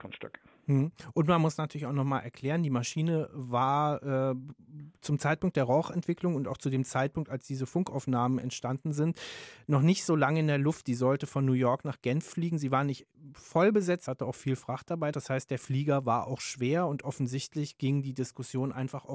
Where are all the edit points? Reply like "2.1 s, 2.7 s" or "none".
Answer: 14.1 s, 15.1 s